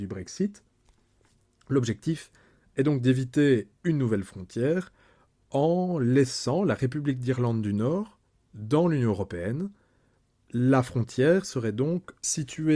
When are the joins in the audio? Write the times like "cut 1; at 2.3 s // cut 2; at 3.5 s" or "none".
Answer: none